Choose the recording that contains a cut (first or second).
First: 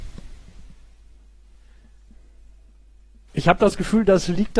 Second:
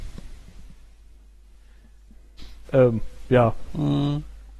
second